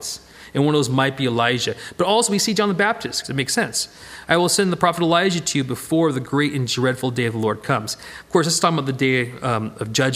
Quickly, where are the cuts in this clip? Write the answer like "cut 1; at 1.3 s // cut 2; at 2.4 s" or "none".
cut 1; at 3.2 s